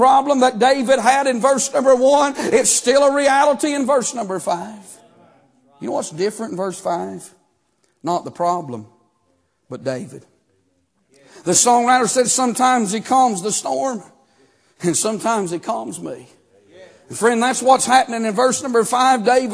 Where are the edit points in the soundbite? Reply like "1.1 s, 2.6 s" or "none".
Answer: none